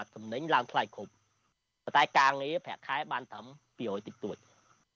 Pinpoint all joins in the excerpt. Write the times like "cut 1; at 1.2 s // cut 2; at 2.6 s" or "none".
cut 1; at 3.7 s